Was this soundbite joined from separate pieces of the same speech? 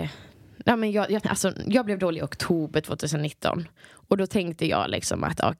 yes; 1 cut; at 1.2 s

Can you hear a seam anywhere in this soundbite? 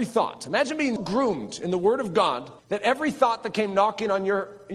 yes; 2 cuts; at 1.0 s, 2.6 s

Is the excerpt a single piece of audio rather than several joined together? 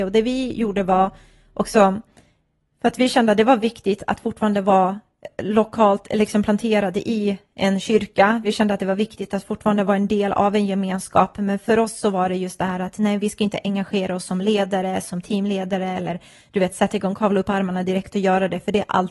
yes; 0 cuts

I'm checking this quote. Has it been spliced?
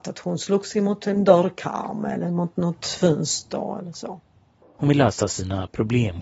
yes; 1 cut; at 4.6 s

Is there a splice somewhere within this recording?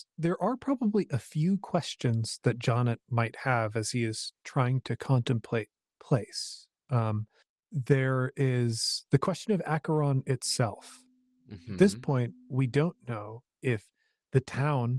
no; 0 cuts

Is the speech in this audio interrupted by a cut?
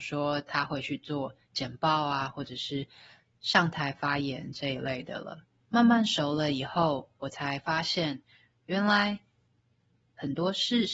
yes; 1 cut; at 5.6 s

